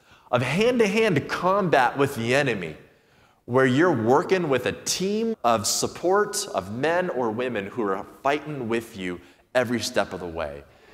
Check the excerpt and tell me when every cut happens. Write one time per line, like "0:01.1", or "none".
0:05.3